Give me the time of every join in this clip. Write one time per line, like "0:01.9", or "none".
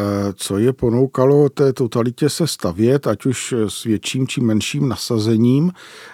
none